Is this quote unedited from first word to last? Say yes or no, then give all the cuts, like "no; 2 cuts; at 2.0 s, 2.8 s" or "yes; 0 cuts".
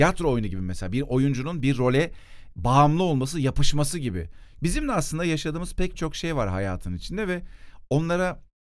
no; 1 cut; at 4.6 s